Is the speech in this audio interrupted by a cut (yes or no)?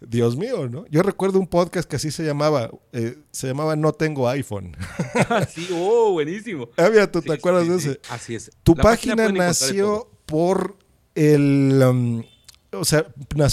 yes